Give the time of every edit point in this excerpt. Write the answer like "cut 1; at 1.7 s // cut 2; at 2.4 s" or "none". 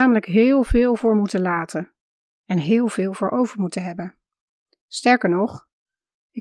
none